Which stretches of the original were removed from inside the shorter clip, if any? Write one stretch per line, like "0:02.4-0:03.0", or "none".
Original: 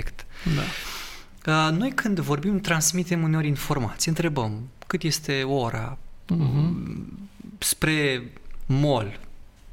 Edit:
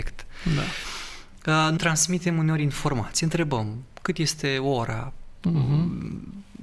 0:01.8-0:02.6

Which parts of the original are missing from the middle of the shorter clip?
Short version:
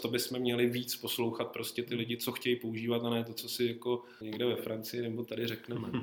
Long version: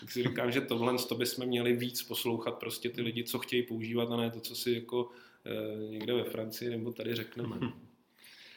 0:05.3-0:05.9

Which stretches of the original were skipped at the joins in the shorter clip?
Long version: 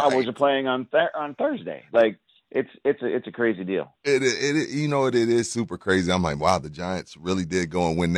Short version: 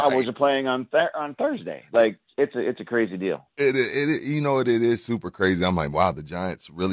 0:02.3-0:02.8

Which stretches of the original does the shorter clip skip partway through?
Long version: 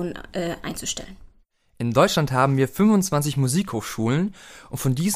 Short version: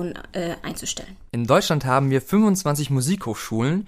0:01.3-0:01.8

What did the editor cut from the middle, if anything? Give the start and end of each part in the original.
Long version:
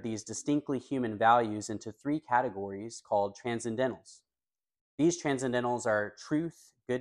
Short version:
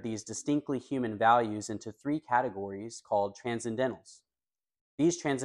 none

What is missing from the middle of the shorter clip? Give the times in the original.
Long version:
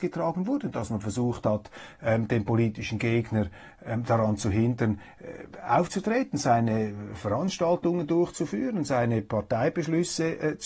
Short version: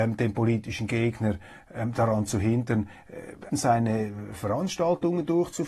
0:05.6-0:06.3

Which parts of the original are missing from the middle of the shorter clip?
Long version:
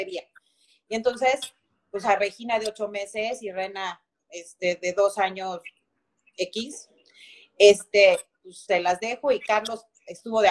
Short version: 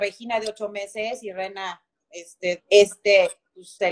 0:04.8-0:07.5

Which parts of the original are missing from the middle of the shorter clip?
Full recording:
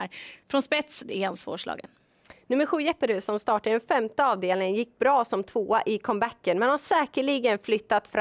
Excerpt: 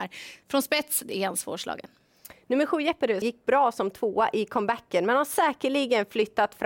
0:03.2-0:04.7

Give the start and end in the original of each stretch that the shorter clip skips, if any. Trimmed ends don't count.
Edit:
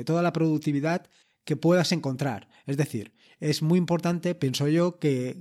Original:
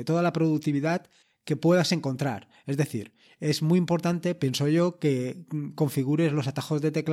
none

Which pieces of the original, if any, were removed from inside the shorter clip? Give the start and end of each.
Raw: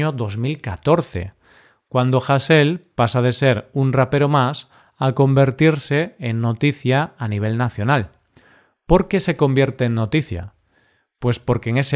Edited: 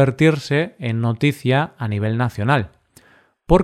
none

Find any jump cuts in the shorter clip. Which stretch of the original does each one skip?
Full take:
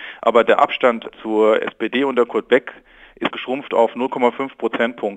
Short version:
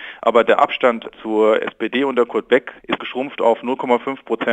0:02.8-0:03.1

